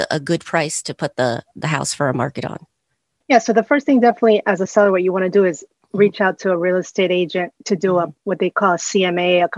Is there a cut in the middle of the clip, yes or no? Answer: no